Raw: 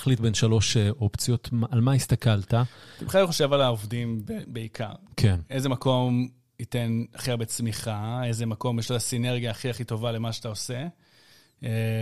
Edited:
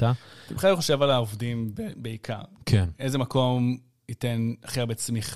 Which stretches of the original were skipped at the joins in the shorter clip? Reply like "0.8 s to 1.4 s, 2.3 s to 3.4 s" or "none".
none